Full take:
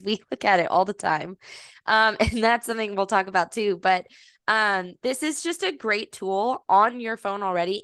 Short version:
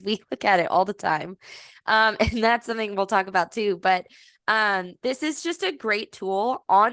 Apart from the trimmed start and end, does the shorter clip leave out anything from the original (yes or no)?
no